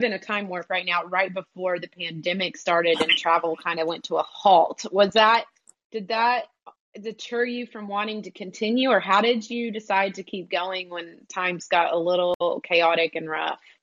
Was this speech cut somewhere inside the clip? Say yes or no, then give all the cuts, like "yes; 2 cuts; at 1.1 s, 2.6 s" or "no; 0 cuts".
no; 0 cuts